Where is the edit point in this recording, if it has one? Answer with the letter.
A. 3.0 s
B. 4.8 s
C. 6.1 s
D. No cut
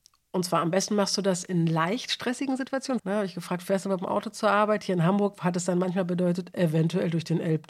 A